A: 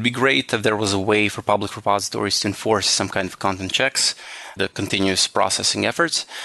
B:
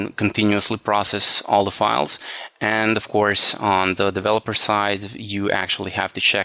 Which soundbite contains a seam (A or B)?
A